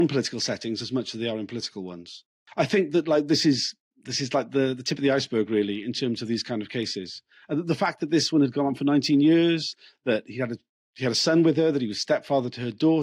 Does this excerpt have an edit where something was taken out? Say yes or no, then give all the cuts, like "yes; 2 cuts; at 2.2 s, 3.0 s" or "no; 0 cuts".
no; 0 cuts